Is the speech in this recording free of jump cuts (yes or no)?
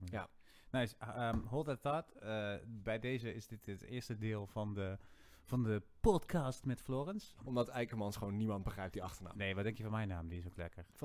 no